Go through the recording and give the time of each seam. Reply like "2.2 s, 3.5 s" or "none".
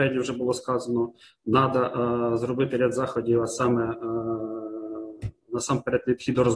none